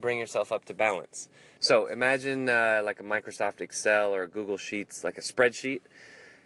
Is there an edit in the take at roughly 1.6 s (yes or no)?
yes